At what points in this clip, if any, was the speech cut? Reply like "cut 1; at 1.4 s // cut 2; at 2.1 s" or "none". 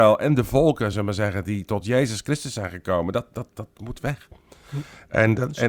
none